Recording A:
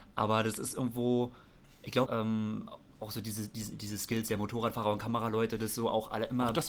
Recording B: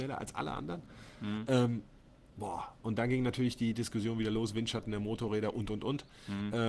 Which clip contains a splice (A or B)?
A